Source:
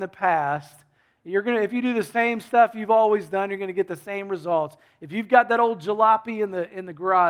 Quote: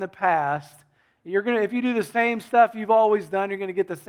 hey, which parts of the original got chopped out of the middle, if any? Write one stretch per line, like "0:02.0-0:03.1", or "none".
none